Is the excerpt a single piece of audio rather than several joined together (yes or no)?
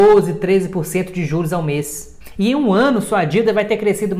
yes